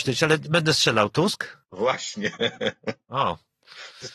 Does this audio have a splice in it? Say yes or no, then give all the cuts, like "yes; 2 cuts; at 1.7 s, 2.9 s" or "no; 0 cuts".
yes; 1 cut; at 1.6 s